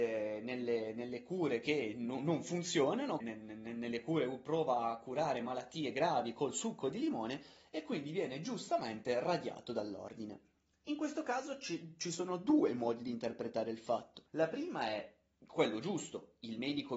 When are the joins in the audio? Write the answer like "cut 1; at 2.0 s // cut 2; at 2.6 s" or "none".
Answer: cut 1; at 3.2 s // cut 2; at 14.3 s